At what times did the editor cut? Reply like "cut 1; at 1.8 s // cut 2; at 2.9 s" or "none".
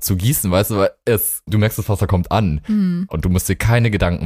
cut 1; at 1.5 s // cut 2; at 3.1 s